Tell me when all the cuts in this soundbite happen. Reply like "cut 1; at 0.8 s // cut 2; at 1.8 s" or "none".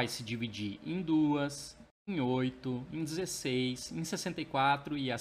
cut 1; at 2.0 s // cut 2; at 3.9 s